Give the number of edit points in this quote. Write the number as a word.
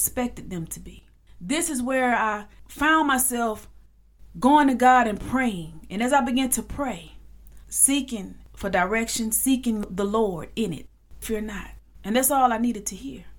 two